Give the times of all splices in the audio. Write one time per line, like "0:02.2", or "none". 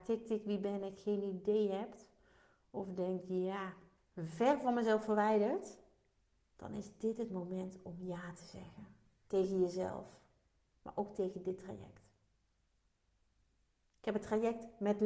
0:04.0